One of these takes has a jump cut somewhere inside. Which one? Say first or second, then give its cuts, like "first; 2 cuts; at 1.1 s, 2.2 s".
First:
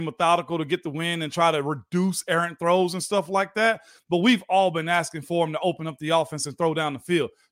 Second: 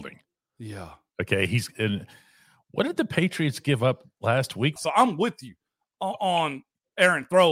second; 1 cut; at 4.8 s